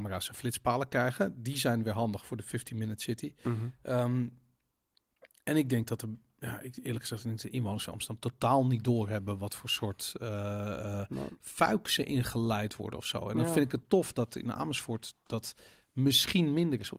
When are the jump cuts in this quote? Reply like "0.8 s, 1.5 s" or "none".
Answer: none